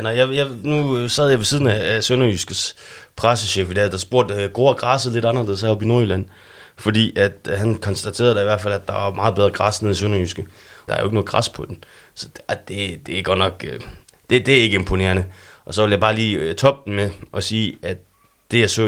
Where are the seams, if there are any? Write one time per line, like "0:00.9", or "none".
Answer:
0:10.9